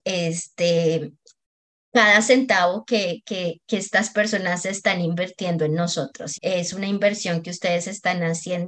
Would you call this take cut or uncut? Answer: cut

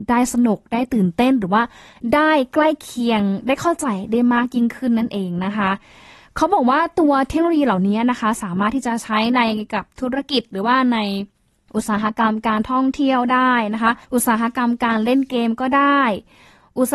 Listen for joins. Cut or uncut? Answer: cut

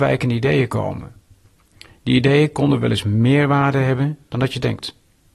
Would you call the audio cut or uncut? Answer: uncut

